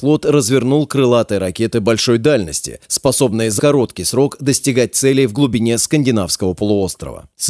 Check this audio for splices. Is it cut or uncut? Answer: cut